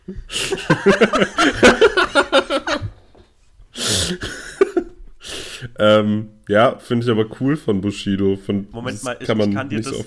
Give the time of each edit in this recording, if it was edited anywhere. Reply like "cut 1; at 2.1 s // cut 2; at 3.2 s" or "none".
cut 1; at 8.7 s